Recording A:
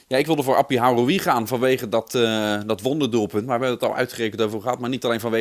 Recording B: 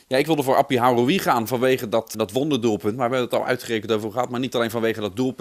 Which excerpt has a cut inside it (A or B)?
B